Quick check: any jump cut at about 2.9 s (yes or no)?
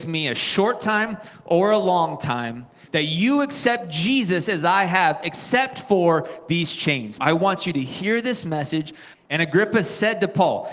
yes